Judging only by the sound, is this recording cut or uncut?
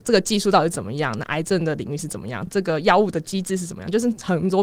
uncut